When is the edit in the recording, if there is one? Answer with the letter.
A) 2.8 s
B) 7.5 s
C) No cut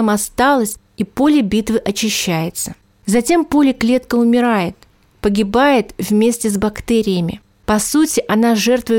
C